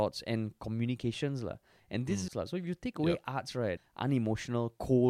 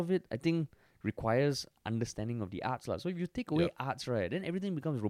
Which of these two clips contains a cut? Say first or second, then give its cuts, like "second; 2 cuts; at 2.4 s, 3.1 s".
first; 2 cuts; at 2.3 s, 3.8 s